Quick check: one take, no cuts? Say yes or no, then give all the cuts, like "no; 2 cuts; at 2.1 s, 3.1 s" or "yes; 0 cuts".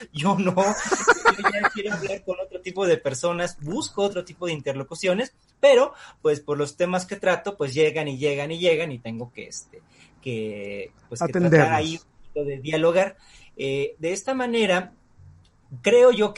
yes; 0 cuts